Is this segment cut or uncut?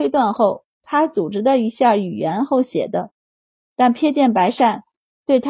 uncut